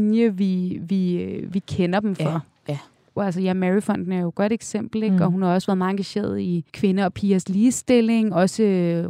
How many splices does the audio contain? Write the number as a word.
two